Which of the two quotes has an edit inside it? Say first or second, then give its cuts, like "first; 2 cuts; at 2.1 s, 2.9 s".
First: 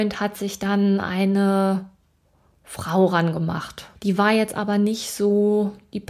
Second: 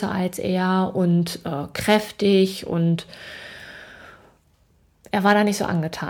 first; 1 cut; at 3.9 s